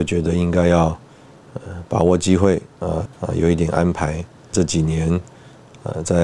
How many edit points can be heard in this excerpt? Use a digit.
2